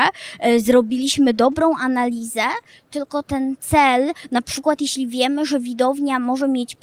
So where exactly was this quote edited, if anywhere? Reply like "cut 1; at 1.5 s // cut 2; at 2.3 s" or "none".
none